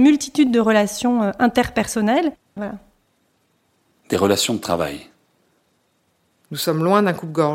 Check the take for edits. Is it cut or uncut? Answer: cut